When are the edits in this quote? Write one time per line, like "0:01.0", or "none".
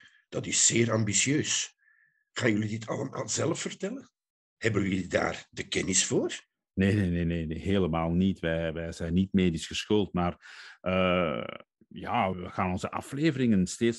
0:12.3